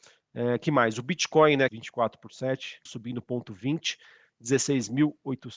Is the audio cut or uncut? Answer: cut